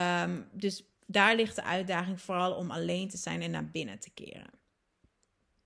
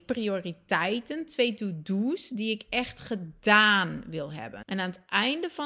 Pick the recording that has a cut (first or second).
second